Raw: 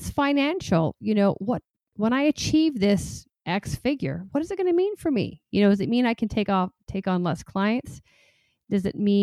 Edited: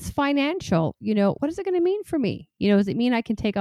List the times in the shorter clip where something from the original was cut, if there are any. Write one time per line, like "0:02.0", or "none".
0:01.4